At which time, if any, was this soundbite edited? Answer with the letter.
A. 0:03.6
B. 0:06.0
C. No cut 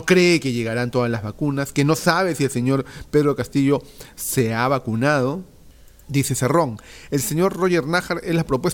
B